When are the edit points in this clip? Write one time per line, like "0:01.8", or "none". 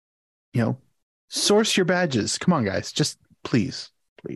none

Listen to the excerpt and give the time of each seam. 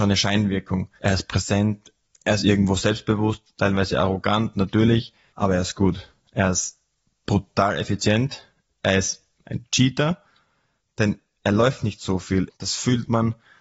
0:09.4
0:12.5

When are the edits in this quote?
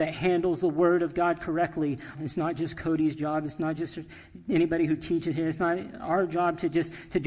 0:02.2

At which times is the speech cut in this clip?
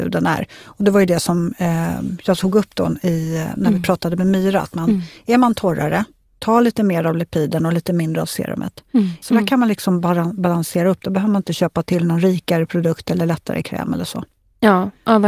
0:09.2

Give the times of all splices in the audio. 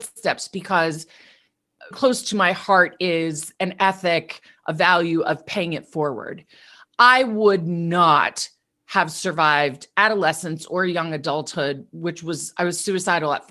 0:01.9

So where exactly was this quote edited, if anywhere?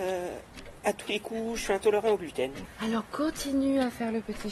0:02.6

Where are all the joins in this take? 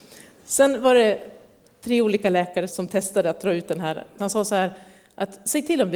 0:02.7
0:04.2

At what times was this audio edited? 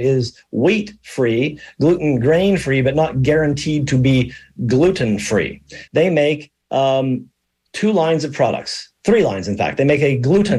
0:05.9

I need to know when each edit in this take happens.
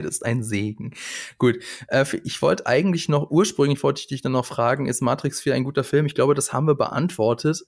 none

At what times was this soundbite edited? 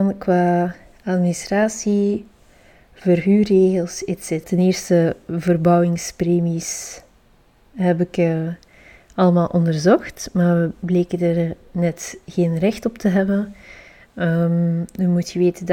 0:04.4

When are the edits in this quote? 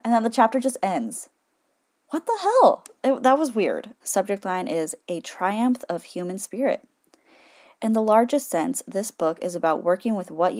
0:04.0

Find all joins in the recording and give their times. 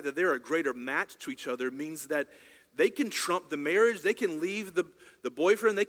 none

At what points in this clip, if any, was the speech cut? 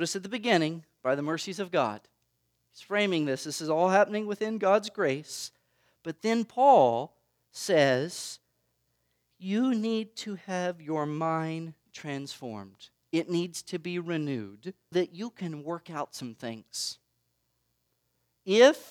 0:14.9

